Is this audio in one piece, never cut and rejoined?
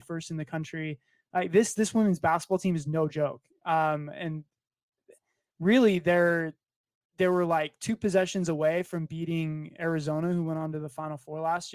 yes; 0 cuts

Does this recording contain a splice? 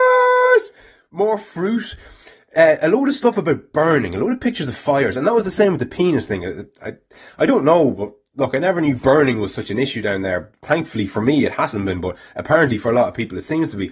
no; 0 cuts

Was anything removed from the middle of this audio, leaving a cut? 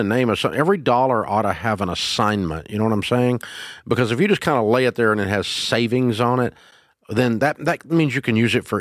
no; 0 cuts

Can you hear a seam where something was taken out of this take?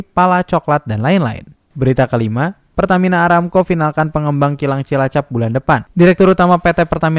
no; 0 cuts

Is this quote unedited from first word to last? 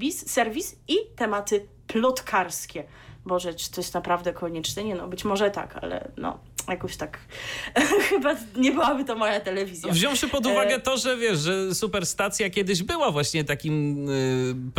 yes; 0 cuts

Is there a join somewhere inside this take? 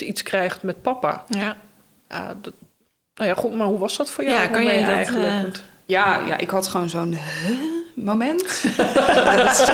no; 0 cuts

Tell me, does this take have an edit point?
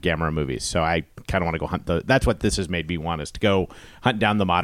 no; 0 cuts

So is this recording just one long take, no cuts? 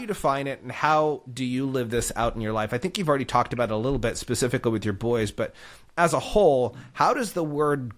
yes; 0 cuts

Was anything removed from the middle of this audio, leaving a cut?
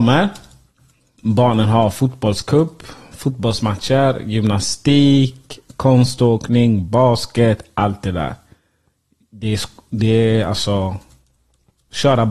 yes; 1 cut; at 5.7 s

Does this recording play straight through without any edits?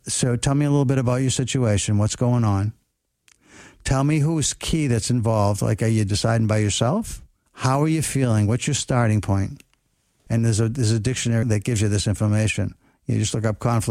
no; 3 cuts; at 7.5 s, 10.3 s, 11.4 s

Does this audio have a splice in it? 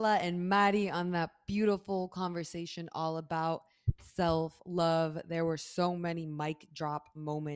no; 0 cuts

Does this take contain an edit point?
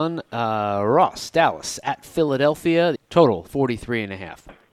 yes; 1 cut; at 3.0 s

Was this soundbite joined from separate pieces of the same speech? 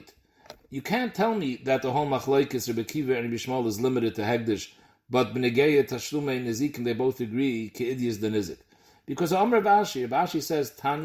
no; 0 cuts

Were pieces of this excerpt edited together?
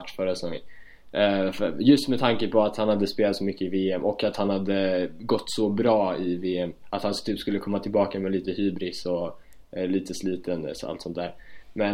no; 0 cuts

